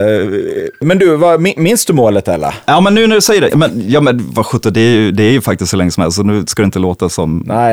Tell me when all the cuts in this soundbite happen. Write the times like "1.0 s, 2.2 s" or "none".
3.5 s